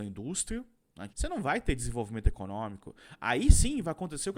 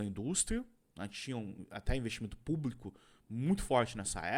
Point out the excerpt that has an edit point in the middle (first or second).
first